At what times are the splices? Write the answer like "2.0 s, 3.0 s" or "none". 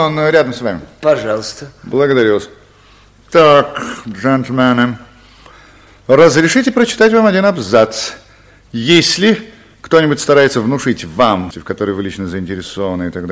11.5 s